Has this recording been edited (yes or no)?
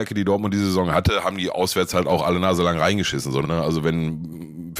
yes